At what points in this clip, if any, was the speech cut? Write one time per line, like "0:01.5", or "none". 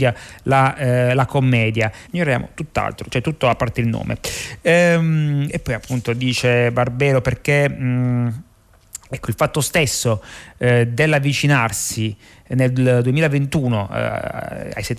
0:02.1